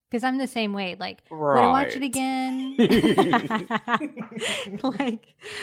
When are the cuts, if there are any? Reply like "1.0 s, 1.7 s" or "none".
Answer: none